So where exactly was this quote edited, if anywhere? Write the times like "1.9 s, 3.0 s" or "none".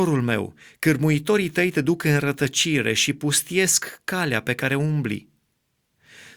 none